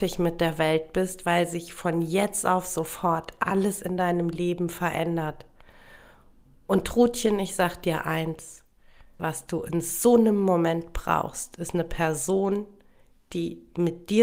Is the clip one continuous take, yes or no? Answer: no